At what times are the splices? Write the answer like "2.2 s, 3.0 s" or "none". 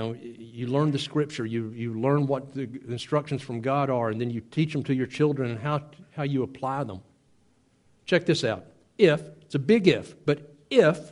8.0 s